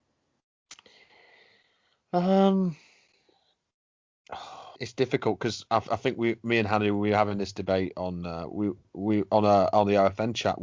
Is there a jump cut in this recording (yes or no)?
yes